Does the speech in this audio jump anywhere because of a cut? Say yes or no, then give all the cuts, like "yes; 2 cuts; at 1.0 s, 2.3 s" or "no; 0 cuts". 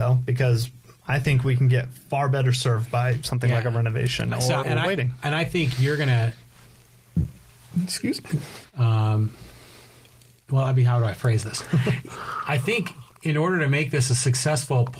yes; 2 cuts; at 4.6 s, 8.6 s